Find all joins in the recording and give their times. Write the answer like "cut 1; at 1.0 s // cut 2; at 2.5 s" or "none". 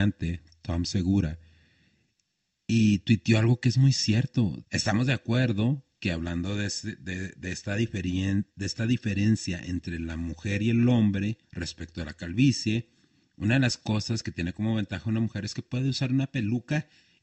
cut 1; at 4.6 s // cut 2; at 11.4 s